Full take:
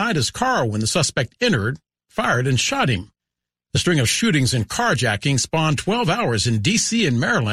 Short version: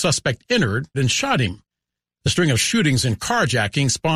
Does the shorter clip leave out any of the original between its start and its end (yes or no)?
yes